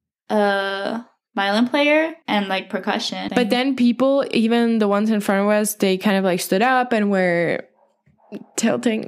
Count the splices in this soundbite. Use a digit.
2